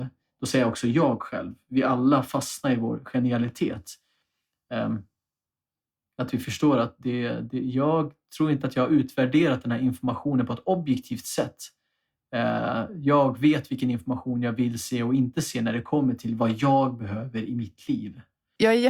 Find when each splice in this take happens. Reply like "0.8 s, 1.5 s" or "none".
none